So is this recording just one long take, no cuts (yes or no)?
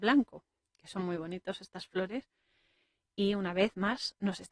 yes